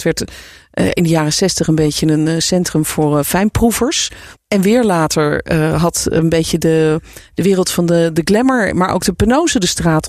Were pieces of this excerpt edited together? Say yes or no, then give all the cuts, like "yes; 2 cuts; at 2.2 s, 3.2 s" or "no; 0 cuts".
yes; 1 cut; at 4.3 s